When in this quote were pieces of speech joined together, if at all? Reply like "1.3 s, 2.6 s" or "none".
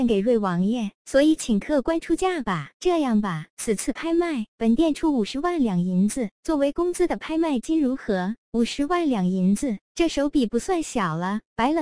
2.7 s